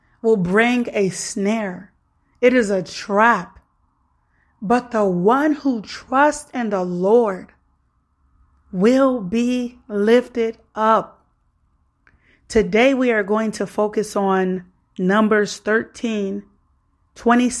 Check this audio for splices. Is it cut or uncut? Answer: uncut